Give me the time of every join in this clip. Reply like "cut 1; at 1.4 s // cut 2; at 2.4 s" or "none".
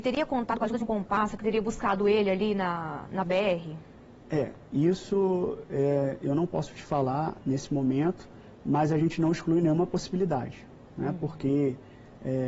none